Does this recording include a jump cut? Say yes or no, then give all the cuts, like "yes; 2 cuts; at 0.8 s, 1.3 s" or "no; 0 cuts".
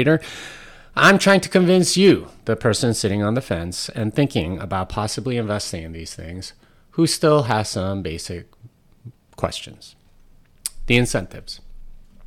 no; 0 cuts